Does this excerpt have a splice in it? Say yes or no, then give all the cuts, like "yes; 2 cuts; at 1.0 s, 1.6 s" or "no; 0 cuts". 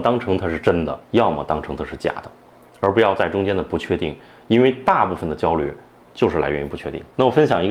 yes; 1 cut; at 1.0 s